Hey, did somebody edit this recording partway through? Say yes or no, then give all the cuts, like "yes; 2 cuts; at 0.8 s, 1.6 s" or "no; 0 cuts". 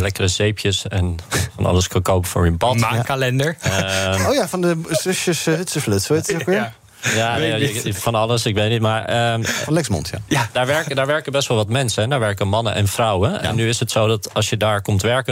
no; 0 cuts